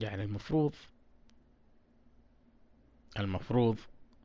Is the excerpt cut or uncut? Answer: uncut